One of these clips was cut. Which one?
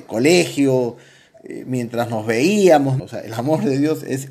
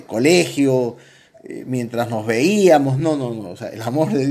first; 1 cut; at 3.0 s

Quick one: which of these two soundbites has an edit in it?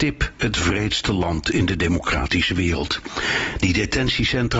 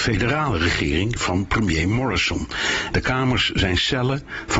second; 1 cut; at 2.9 s

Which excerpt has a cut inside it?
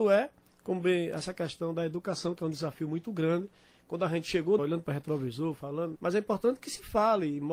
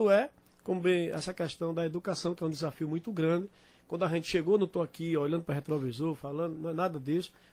first; 2 cuts; at 4.6 s, 6.0 s

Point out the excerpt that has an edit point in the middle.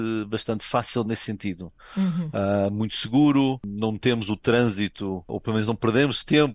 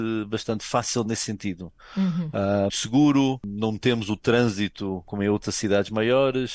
second; 2 cuts; at 2.7 s, 5.0 s

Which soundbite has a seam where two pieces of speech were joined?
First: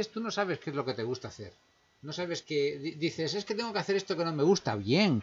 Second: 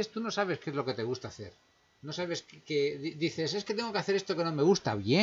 first; 1 cut; at 2.4 s

